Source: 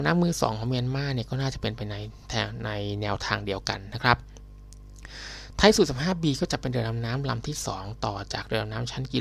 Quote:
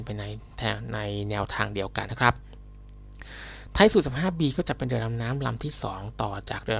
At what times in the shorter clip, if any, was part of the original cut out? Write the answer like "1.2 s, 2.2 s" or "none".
2.1 s